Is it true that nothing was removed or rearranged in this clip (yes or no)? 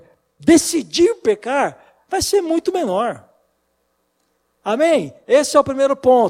no